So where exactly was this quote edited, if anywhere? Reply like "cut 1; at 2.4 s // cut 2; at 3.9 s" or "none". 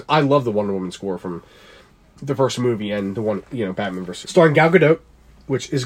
cut 1; at 4.2 s